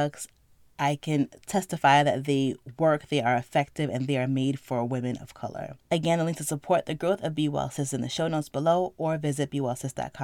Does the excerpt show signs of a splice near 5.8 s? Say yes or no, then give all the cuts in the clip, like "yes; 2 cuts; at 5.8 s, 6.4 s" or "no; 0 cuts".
yes; 1 cut; at 5.8 s